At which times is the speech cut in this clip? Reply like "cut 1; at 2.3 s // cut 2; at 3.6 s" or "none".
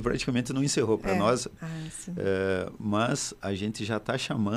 cut 1; at 1.6 s